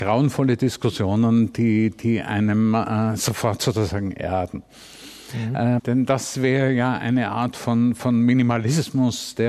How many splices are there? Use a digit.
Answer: 1